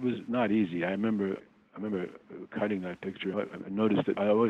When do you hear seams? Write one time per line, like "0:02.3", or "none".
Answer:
0:01.4
0:03.3